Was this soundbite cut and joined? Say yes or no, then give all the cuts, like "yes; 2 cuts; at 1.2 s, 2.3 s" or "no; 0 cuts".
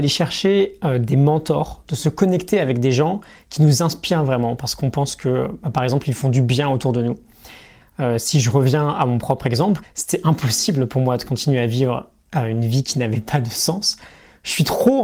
yes; 2 cuts; at 7.8 s, 9.8 s